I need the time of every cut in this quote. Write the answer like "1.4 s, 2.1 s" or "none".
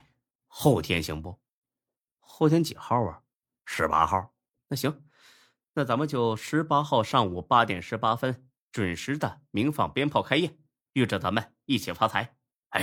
none